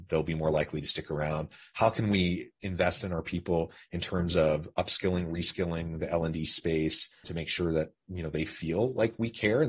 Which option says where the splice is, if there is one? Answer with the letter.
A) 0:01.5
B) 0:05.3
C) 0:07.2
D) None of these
C